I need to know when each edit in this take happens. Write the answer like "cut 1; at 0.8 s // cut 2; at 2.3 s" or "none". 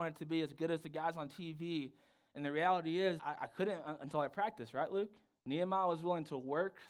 cut 1; at 3.2 s // cut 2; at 5.4 s